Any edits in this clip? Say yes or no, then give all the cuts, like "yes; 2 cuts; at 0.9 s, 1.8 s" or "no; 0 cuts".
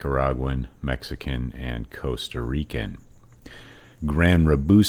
yes; 1 cut; at 3.9 s